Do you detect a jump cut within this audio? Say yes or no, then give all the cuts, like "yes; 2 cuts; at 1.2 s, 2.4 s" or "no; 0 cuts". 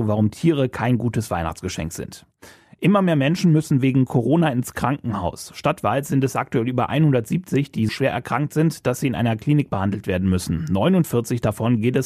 yes; 1 cut; at 7.9 s